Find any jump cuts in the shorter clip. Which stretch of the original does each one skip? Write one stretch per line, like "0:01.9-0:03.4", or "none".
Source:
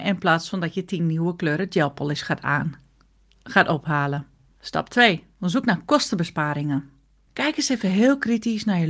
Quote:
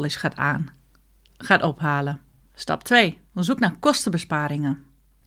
none